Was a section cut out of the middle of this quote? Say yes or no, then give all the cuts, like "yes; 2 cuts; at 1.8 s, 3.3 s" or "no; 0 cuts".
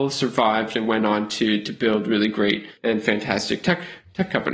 yes; 1 cut; at 2.8 s